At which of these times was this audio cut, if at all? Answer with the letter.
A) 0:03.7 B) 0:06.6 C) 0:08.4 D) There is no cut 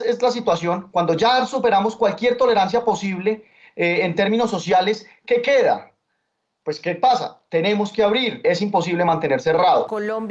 C